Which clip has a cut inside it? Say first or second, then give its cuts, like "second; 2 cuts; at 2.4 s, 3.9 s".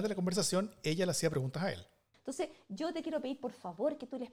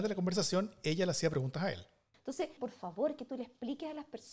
second; 1 cut; at 2.6 s